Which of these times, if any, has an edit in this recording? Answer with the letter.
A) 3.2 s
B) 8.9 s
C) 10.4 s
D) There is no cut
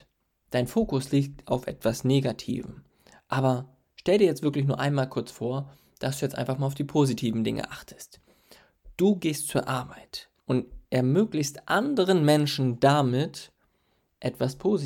C